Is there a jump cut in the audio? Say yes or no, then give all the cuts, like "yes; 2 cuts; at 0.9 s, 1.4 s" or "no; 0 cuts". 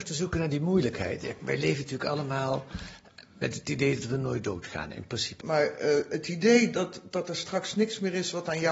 yes; 2 cuts; at 1.4 s, 5.4 s